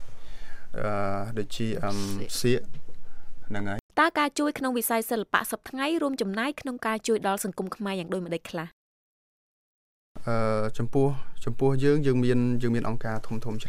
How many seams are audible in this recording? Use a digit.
1